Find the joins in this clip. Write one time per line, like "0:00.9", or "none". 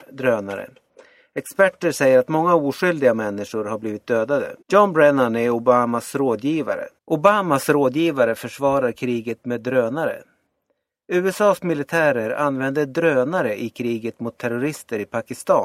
0:04.6
0:07.0

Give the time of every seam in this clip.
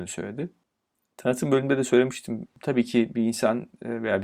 0:02.5

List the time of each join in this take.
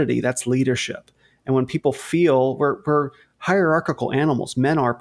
none

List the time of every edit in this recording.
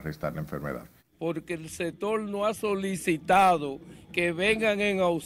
0:01.0

